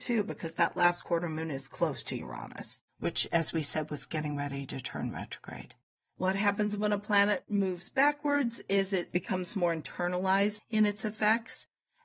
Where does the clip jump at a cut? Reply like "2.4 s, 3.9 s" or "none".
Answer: 10.6 s